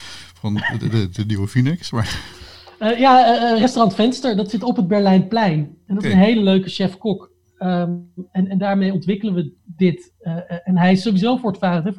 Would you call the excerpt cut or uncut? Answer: uncut